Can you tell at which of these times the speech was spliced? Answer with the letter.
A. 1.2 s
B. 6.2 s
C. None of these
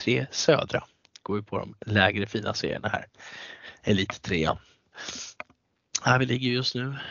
C